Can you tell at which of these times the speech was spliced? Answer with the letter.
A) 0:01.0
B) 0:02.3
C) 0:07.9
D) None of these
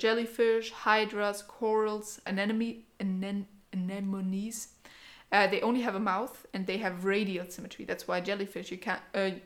B